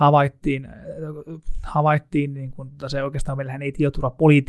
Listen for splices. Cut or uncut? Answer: uncut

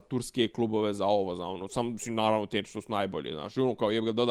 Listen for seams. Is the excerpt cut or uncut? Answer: uncut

